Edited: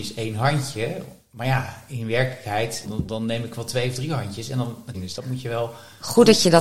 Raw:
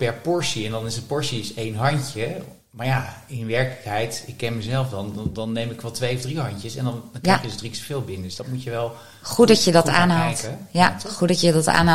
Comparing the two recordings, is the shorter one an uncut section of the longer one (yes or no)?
no